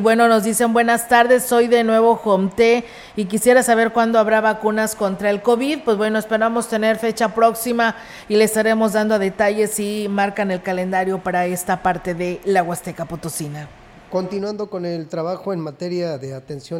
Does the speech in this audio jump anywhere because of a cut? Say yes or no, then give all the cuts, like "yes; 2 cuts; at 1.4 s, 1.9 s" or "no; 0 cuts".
no; 0 cuts